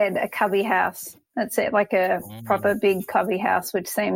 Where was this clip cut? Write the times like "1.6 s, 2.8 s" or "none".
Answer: none